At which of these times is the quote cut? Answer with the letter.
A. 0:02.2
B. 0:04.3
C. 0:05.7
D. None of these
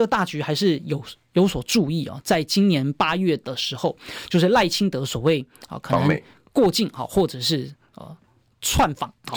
D